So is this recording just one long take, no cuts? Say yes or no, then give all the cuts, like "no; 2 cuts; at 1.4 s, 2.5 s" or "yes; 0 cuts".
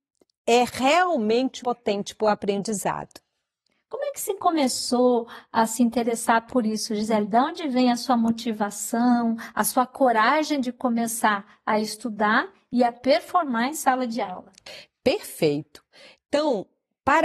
no; 1 cut; at 1.6 s